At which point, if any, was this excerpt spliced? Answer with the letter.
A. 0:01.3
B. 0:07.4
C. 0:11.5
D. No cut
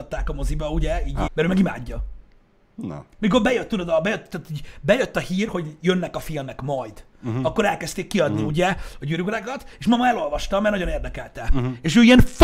A